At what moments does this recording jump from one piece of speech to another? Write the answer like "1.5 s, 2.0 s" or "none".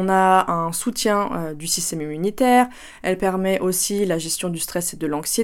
none